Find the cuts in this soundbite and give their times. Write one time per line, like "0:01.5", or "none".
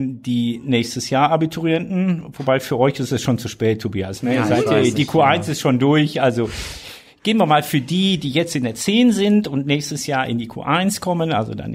none